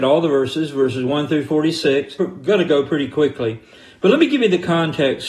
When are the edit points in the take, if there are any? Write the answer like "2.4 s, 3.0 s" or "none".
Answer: 2.2 s